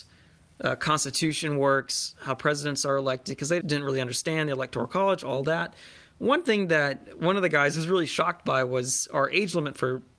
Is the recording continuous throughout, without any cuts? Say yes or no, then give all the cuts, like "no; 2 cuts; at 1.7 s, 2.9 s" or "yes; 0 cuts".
no; 1 cut; at 3.6 s